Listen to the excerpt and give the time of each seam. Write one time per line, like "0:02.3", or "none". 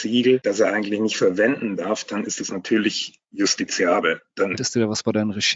0:04.6